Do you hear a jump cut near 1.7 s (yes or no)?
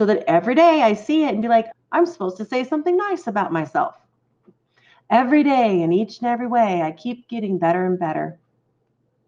yes